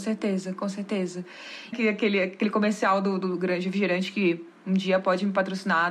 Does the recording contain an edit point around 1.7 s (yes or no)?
yes